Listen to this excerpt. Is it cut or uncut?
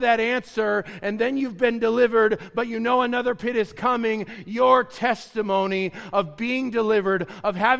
uncut